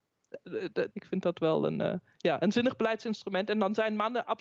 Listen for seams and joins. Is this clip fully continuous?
no; 1 cut; at 0.9 s

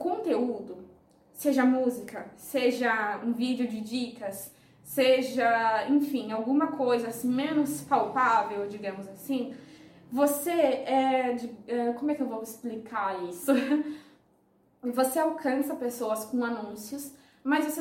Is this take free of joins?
yes; 0 cuts

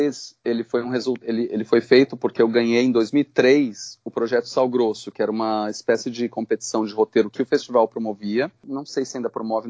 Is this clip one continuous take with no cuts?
yes; 0 cuts

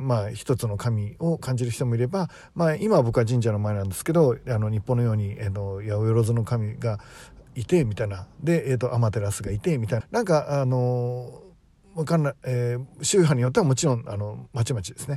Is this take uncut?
no; 1 cut; at 10.0 s

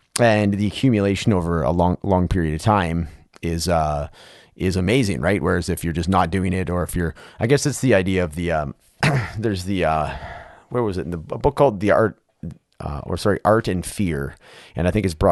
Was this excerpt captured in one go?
yes; 0 cuts

